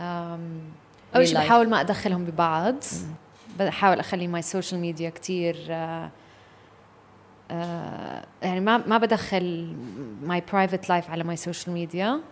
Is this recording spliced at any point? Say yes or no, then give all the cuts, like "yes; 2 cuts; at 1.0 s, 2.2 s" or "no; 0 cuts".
yes; 1 cut; at 1.1 s